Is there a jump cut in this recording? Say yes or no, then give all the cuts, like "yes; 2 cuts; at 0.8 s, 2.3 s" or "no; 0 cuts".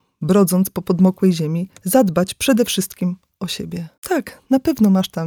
yes; 1 cut; at 4.0 s